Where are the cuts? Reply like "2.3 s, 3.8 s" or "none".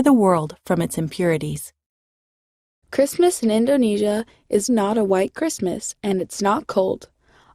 2.8 s, 4.7 s

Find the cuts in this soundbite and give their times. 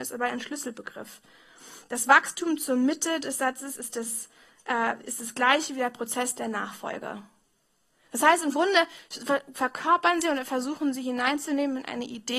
none

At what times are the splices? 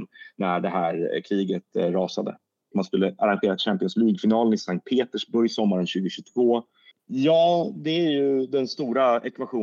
2.7 s, 6.9 s

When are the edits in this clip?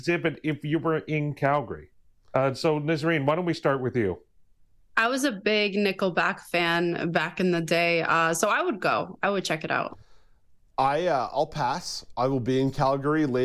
none

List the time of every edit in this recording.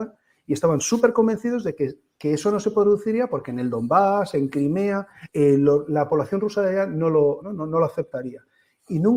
5.3 s, 7.4 s

